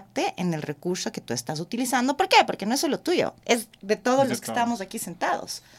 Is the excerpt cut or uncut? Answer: cut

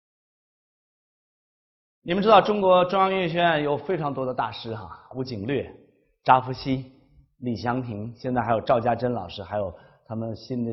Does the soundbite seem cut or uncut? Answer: uncut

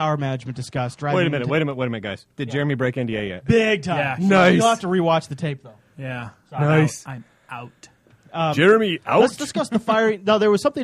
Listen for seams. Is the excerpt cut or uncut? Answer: uncut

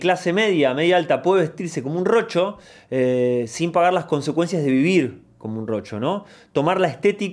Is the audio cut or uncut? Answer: uncut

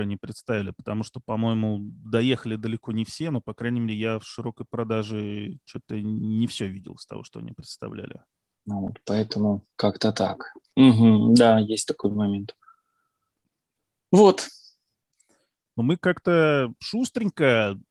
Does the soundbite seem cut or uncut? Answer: cut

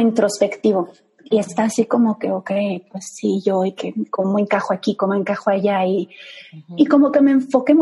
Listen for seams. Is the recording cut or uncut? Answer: uncut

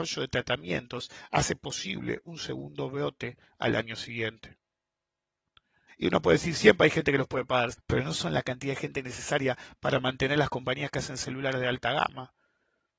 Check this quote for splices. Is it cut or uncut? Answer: cut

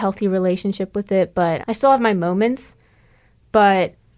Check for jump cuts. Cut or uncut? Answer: cut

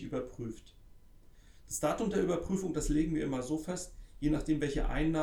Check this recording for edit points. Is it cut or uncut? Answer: uncut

